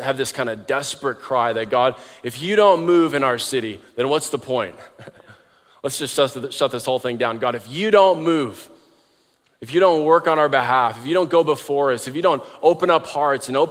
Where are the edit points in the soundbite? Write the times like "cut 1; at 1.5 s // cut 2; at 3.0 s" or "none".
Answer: none